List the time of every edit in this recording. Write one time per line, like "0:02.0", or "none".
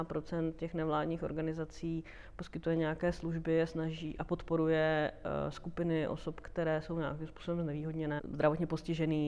0:08.2